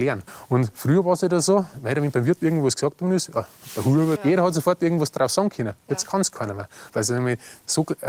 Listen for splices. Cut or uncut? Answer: cut